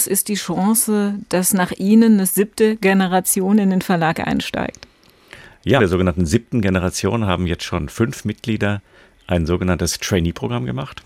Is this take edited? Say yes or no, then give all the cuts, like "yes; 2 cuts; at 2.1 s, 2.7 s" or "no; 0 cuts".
yes; 1 cut; at 5.8 s